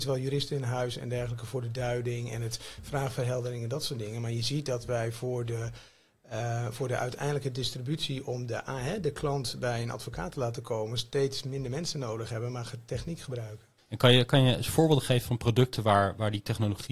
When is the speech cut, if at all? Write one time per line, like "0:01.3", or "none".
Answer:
0:13.8